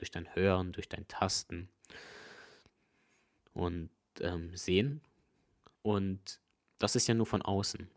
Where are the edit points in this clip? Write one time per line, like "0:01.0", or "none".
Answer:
0:05.8